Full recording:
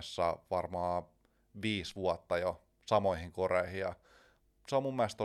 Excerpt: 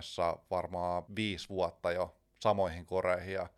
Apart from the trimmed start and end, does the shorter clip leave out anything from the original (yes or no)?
yes